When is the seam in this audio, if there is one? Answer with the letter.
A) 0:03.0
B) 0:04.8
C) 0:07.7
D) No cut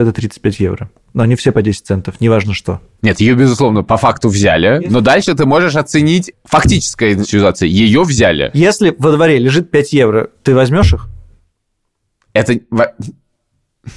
A